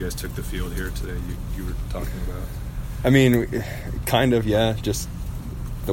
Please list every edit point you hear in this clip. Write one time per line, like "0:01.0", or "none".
none